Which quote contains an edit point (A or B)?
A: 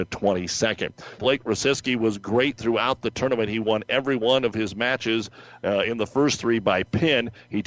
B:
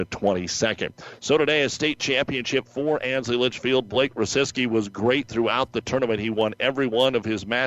A